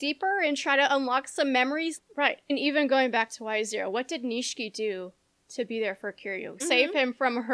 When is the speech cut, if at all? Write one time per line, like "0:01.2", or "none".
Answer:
0:02.0
0:06.6